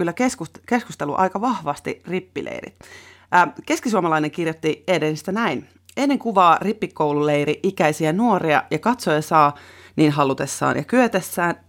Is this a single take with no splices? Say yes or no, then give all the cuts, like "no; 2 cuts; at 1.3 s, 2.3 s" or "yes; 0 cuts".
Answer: yes; 0 cuts